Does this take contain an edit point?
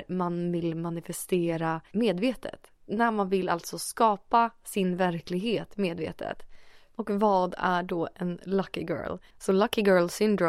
yes; 1 cut; at 9.3 s

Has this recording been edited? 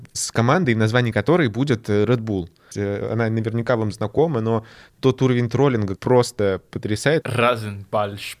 yes; 3 cuts; at 2.7 s, 6.0 s, 7.2 s

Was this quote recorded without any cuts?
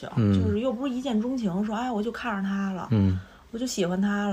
yes; 0 cuts

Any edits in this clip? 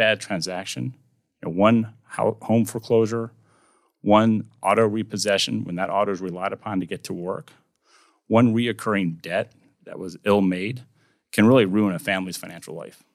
no; 0 cuts

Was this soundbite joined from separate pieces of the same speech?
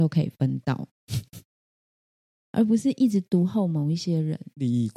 no; 0 cuts

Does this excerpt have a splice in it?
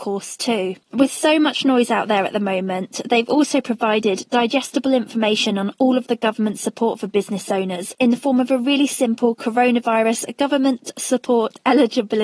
no; 0 cuts

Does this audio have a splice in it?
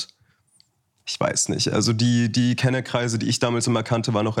no; 0 cuts

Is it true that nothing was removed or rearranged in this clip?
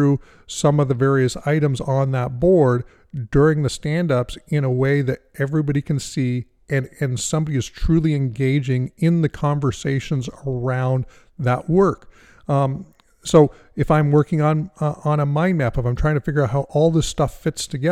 yes; 0 cuts

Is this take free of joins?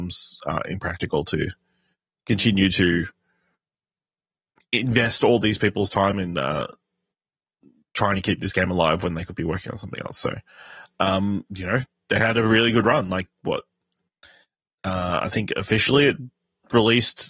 yes; 0 cuts

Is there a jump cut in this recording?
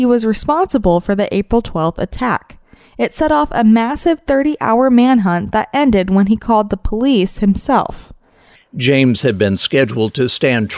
yes; 1 cut; at 8.5 s

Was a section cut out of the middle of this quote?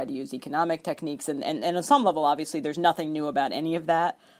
no; 0 cuts

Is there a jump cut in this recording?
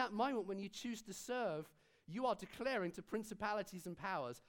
no; 0 cuts

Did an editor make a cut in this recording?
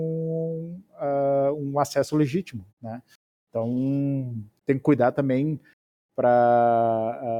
yes; 1 cut; at 2.7 s

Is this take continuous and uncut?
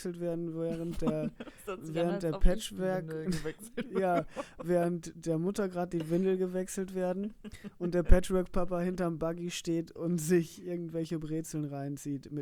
yes; 0 cuts

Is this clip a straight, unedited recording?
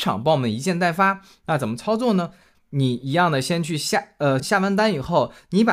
no; 2 cuts; at 2.5 s, 4.4 s

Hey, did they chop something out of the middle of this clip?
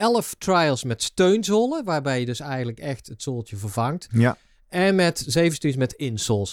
no; 0 cuts

